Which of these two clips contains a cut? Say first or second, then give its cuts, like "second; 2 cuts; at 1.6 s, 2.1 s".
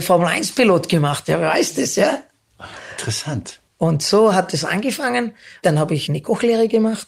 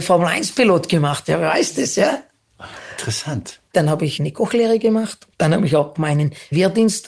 second; 1 cut; at 3.7 s